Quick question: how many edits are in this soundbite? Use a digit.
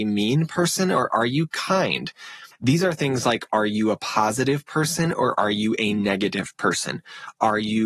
1